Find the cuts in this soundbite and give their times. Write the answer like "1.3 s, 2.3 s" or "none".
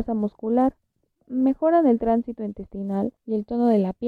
3.2 s